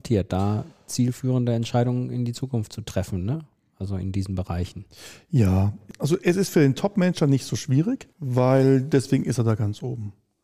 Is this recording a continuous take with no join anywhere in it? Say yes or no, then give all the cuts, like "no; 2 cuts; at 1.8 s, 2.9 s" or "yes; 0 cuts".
no; 1 cut; at 8.1 s